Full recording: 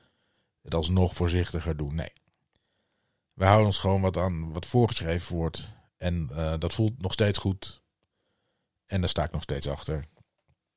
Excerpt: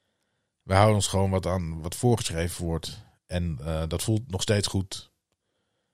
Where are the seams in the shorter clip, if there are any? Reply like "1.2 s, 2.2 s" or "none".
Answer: none